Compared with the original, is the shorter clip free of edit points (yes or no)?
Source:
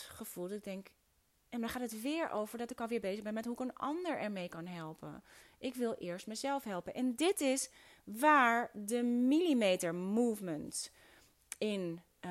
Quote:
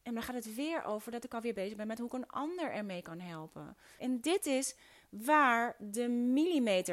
no